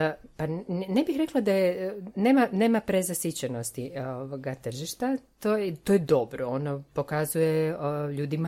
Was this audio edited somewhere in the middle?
no; 0 cuts

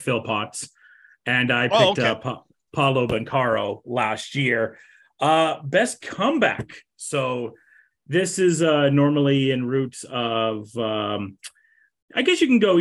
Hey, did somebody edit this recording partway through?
no; 0 cuts

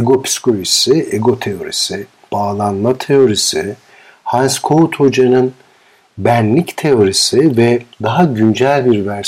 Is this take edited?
yes; 2 cuts; at 2.3 s, 7.9 s

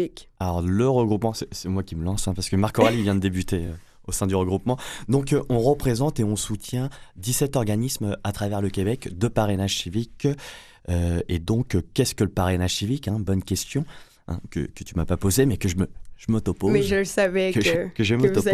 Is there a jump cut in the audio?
no; 0 cuts

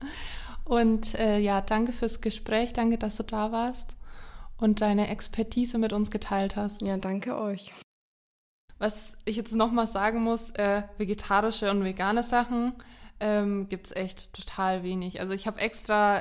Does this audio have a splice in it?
no; 0 cuts

